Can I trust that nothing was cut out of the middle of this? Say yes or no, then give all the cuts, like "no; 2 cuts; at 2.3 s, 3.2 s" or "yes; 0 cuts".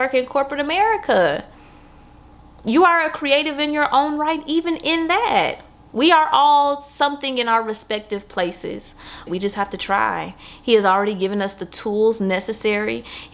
no; 1 cut; at 9.3 s